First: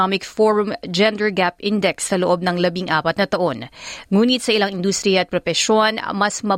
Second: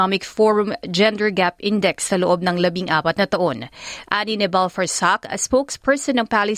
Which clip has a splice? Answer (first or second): second